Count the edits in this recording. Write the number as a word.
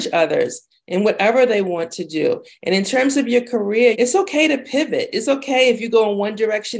one